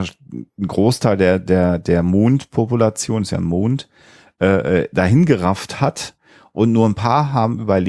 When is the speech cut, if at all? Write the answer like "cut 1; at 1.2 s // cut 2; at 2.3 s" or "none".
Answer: none